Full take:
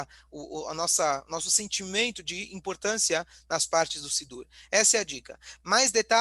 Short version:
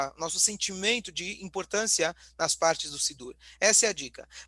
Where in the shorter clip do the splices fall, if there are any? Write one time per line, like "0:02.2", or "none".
none